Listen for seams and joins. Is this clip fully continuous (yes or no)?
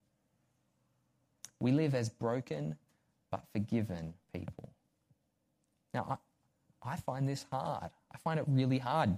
yes